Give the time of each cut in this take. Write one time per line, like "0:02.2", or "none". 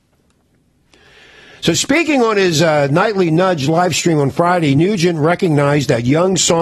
none